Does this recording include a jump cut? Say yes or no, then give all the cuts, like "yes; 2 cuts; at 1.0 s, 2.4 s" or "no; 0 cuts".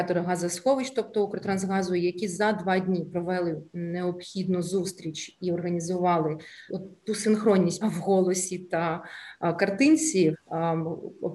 yes; 3 cuts; at 6.7 s, 7.8 s, 10.3 s